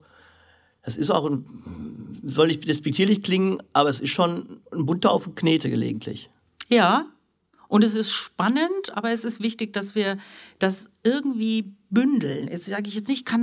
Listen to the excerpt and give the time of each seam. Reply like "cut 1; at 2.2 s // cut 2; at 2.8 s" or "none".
none